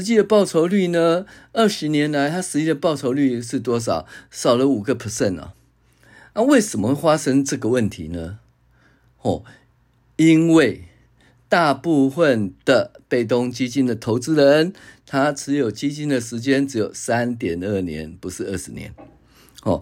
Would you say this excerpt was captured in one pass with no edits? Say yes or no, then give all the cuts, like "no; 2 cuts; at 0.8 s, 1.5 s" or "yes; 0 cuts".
yes; 0 cuts